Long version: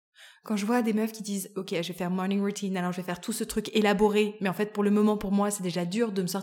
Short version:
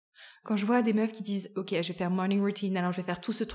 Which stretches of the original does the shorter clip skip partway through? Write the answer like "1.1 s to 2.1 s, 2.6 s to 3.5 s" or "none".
none